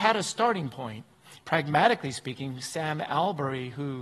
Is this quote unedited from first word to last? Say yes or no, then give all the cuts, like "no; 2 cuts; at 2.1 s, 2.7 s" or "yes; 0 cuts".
no; 1 cut; at 1.4 s